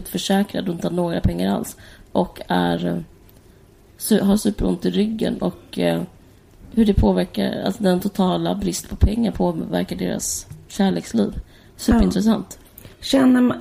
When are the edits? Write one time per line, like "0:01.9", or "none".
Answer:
none